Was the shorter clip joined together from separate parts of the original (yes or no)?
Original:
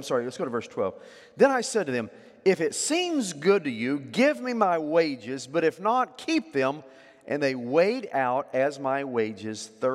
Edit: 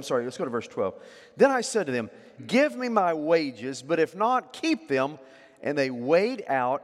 yes